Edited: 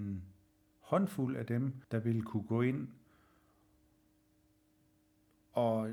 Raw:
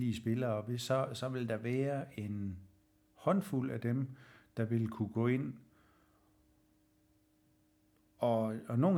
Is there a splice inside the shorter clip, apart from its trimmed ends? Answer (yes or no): yes